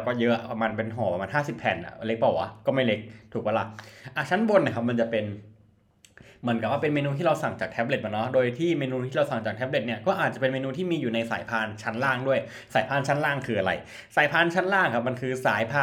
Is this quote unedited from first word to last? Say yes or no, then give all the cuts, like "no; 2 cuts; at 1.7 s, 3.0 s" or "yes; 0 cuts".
yes; 0 cuts